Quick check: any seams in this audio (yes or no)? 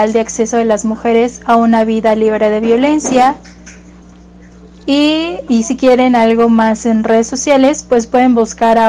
yes